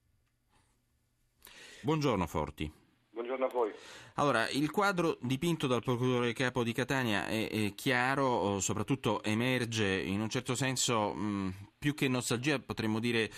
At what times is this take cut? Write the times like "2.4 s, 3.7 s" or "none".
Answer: 1.8 s